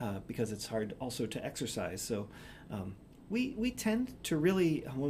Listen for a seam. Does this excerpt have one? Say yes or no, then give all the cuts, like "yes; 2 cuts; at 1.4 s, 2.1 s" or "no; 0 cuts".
no; 0 cuts